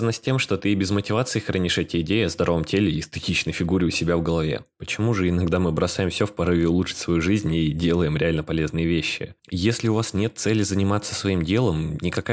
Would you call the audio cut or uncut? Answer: cut